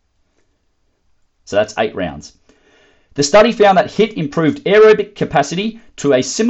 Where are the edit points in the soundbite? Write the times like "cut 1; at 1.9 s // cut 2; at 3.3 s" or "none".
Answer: cut 1; at 1.4 s